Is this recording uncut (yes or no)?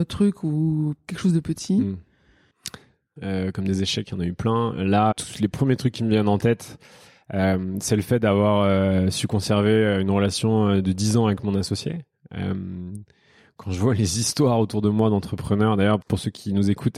no